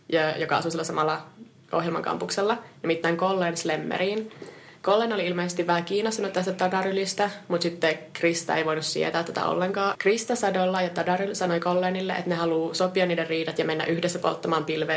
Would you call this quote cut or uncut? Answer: cut